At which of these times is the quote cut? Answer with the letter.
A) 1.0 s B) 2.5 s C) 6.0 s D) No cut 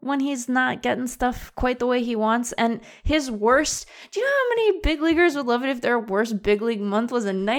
D